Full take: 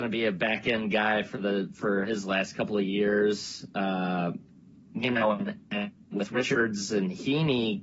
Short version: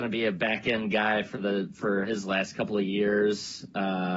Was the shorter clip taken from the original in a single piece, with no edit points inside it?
yes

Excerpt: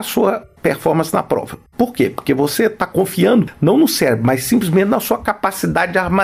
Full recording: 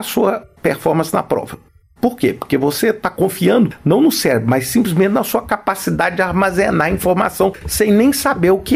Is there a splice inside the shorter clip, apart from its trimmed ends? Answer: yes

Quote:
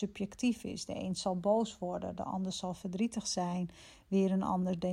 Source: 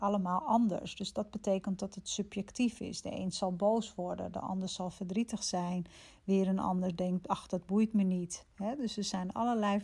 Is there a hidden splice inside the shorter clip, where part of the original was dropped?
no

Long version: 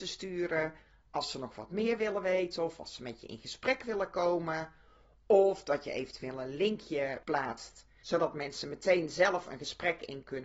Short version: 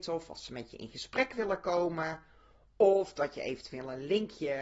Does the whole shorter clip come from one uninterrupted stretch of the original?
yes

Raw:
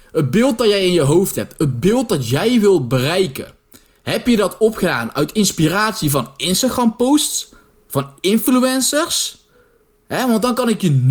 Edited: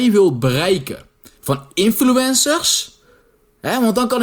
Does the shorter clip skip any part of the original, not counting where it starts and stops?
yes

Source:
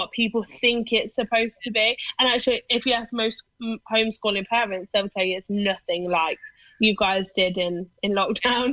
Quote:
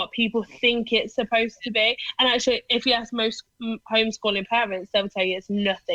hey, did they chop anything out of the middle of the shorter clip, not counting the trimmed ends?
no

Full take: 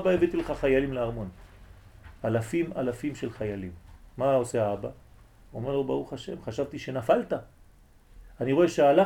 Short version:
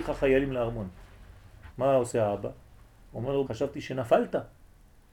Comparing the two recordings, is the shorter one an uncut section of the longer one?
no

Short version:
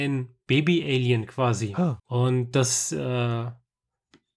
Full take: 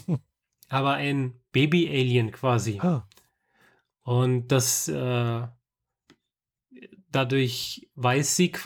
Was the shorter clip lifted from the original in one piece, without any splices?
no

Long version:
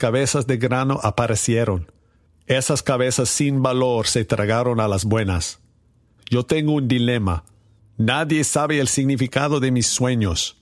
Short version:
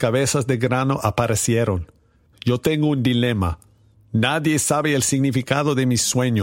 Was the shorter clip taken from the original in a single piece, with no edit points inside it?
no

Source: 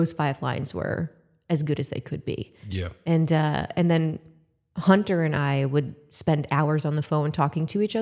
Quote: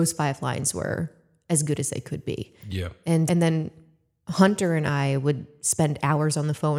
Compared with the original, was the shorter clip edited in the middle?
yes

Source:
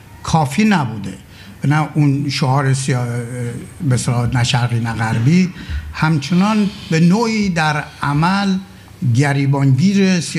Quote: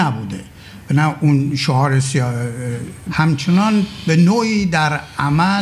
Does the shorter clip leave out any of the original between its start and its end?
yes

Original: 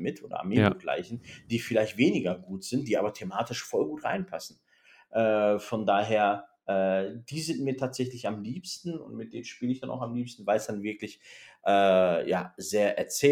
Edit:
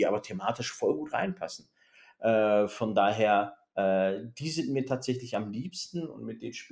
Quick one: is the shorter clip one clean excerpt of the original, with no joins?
yes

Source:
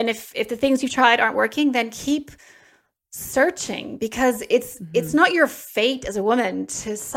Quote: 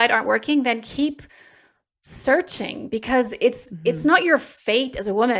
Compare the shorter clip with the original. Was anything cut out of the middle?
no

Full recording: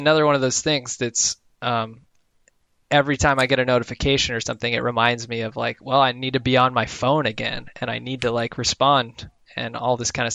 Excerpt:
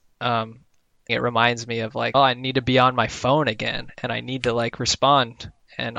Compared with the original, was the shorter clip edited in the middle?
yes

